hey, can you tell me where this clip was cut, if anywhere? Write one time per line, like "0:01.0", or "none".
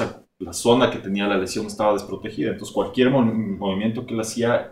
none

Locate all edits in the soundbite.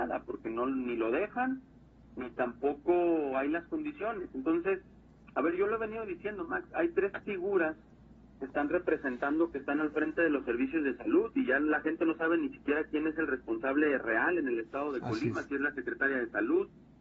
none

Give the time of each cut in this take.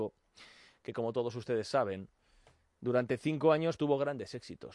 0:03.8

